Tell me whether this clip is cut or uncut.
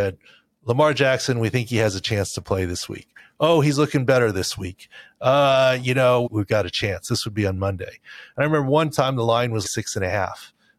cut